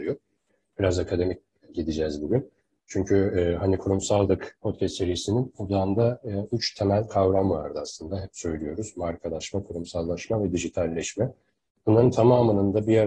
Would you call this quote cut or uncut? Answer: uncut